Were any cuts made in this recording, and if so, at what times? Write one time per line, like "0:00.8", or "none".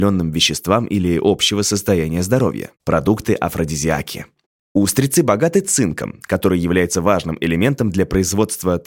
0:02.8
0:04.6